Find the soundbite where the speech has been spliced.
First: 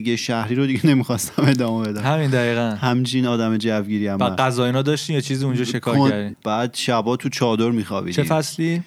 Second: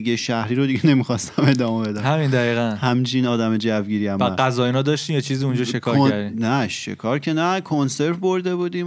first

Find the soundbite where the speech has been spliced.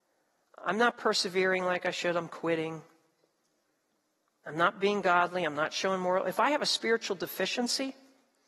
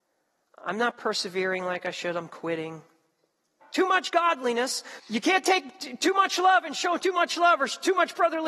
second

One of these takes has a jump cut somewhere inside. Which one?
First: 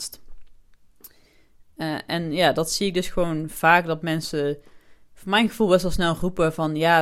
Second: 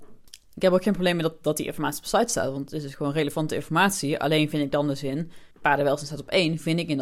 second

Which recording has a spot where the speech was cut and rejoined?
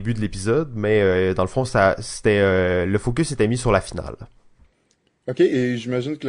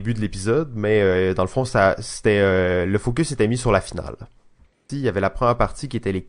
second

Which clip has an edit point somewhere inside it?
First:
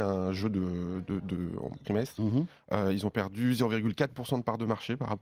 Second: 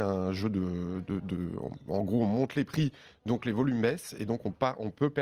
first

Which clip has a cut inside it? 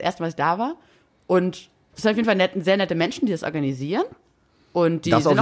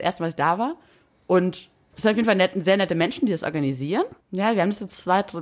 second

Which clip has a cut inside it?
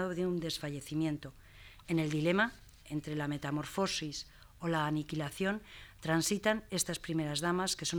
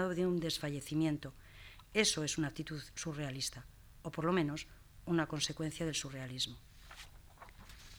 first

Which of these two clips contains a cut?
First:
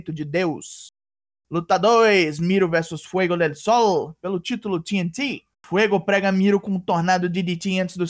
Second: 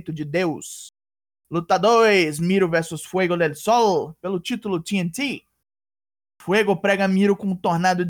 first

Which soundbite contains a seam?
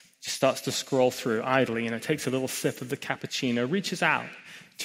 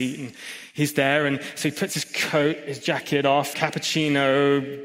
second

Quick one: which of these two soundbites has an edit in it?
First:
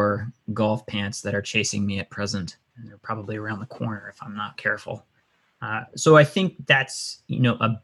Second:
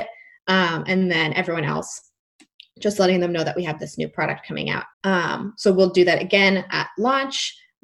second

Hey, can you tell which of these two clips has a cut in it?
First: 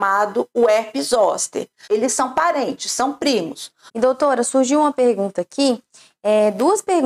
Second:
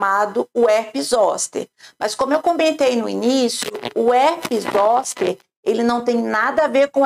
first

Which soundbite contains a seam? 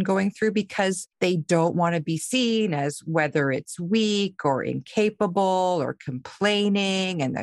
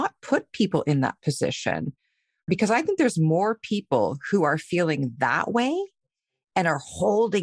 first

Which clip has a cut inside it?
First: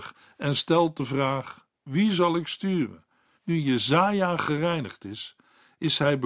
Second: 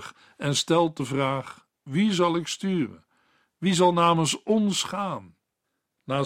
first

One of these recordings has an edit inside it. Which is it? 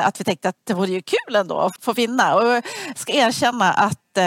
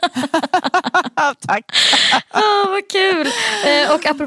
first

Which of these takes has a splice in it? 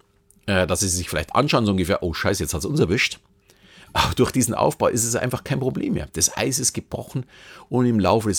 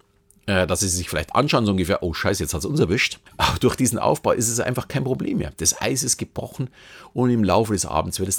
second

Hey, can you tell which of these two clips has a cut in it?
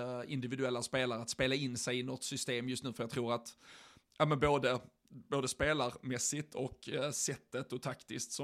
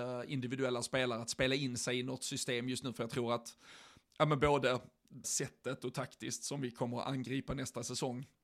second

